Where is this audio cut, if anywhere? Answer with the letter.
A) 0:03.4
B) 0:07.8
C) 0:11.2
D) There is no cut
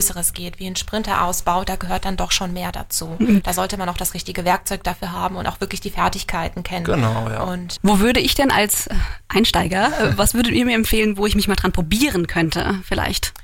B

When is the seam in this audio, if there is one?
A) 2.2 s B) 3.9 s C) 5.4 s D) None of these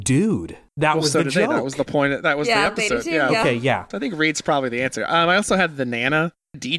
D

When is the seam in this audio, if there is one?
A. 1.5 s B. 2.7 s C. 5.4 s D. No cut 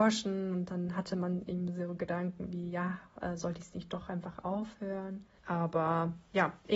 C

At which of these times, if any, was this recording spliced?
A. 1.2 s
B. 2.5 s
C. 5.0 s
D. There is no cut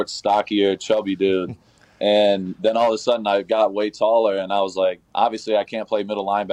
C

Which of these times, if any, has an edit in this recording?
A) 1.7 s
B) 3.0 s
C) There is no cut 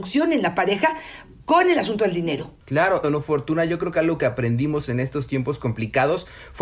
B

